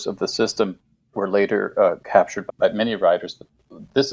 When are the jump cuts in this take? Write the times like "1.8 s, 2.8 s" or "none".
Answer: 1.1 s, 2.5 s